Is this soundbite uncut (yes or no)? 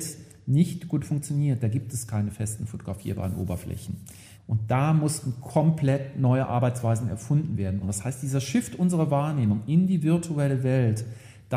no